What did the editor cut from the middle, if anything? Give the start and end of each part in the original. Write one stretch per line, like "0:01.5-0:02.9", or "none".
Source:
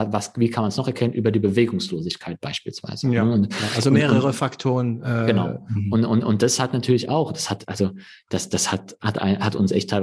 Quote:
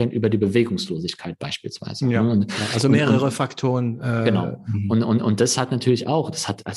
none